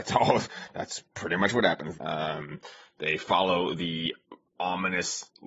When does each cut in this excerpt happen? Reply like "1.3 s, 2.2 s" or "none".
1.9 s